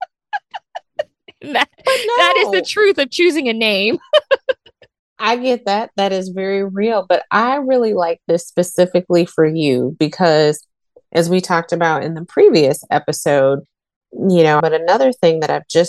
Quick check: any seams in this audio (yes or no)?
yes